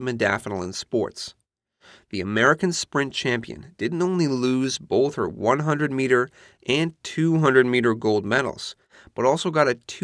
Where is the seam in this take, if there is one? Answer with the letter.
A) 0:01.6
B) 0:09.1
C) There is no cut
C